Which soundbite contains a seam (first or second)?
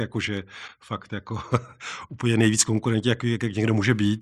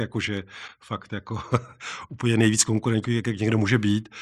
second